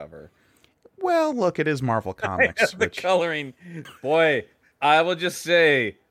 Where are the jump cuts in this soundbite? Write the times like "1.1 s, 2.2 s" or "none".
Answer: 3.9 s